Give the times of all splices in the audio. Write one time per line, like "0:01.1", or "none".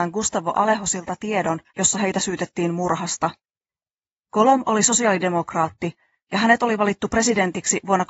0:01.7